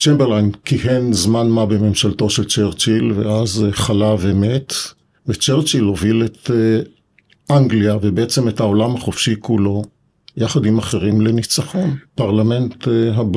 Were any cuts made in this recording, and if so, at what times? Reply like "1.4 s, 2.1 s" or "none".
12.1 s

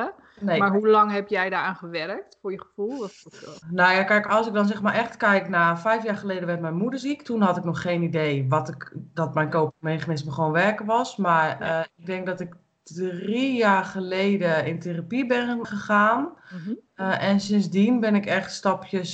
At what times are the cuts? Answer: 3.6 s, 15.6 s

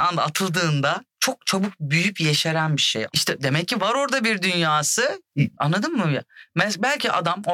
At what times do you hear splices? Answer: 3.1 s, 5.5 s

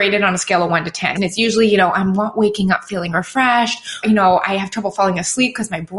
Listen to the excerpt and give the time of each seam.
1.2 s, 4.0 s

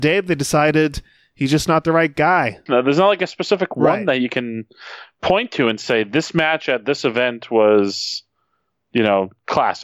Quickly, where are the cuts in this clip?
2.7 s

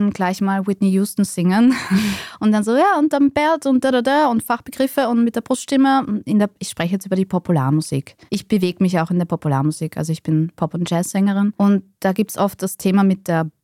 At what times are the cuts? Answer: none

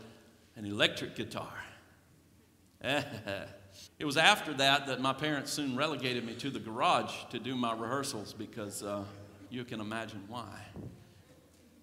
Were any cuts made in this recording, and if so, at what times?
3.9 s, 9.5 s

